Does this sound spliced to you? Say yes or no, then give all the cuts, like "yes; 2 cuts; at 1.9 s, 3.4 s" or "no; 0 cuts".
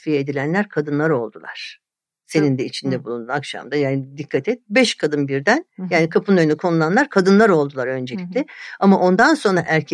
no; 0 cuts